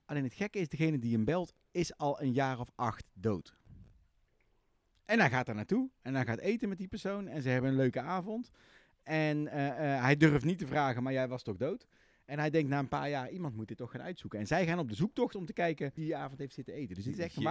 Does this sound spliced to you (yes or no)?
yes